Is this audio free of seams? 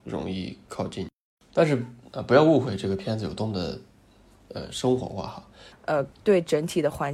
no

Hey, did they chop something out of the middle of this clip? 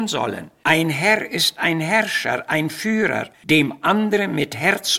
yes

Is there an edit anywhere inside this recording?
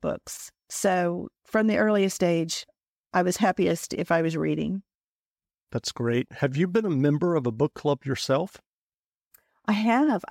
no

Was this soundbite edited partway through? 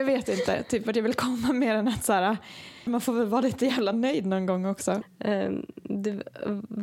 yes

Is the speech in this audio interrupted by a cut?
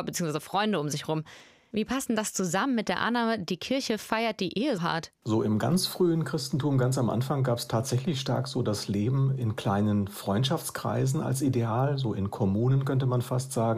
yes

